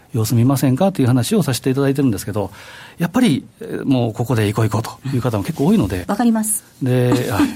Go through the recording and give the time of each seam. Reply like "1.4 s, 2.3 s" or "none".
6.0 s